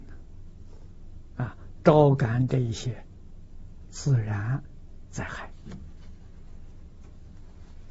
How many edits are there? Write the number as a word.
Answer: zero